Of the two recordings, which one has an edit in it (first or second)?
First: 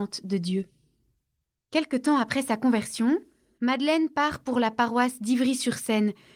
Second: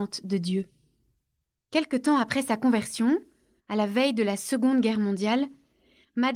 first